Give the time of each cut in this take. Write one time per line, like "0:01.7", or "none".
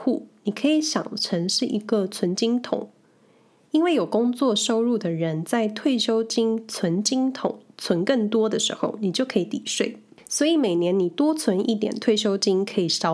none